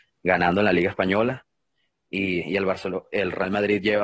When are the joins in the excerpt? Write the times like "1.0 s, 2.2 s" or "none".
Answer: none